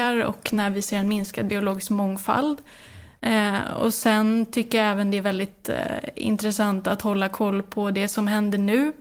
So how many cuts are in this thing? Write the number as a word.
one